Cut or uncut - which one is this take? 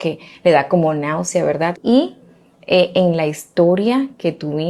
cut